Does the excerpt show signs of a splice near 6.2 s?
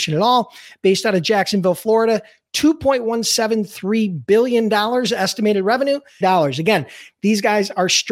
yes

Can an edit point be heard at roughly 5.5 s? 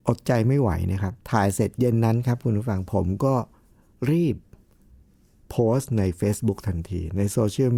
no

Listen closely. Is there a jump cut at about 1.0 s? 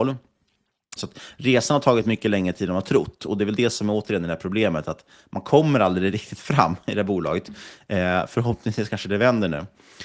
yes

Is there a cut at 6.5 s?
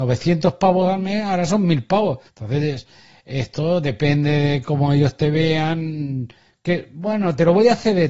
no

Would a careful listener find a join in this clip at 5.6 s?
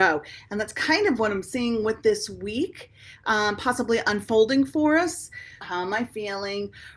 yes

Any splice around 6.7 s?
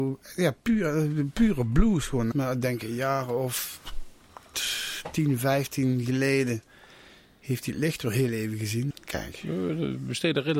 no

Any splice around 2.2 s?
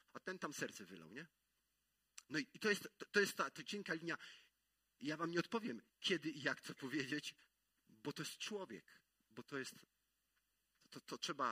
yes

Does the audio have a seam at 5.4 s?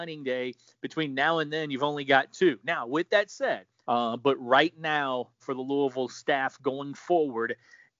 yes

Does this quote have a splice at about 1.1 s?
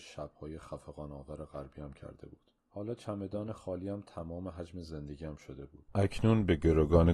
no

